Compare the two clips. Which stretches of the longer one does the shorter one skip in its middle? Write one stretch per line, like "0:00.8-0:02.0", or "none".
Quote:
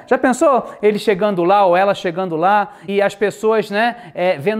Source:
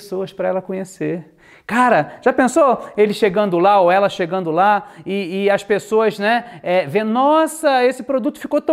0:05.0-0:05.4